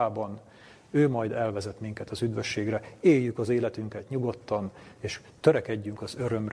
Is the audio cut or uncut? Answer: uncut